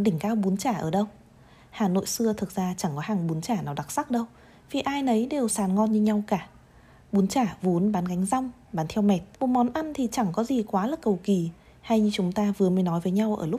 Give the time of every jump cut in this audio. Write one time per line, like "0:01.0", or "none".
0:05.5
0:09.3

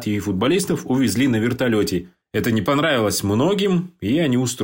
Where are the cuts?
none

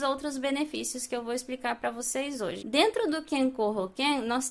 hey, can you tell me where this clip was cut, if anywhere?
0:02.6

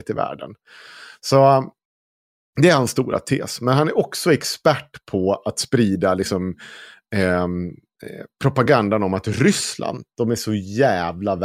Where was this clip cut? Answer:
none

